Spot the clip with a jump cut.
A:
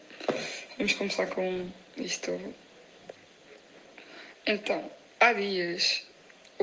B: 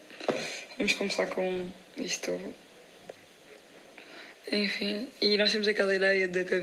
B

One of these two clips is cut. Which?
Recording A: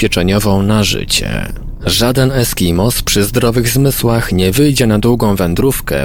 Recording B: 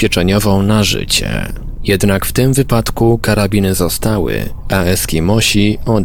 B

